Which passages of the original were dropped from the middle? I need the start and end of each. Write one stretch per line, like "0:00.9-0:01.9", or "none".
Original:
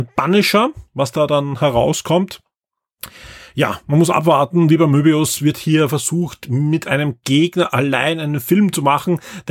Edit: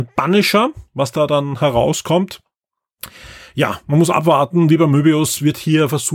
none